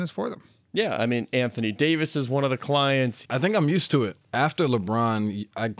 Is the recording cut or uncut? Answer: cut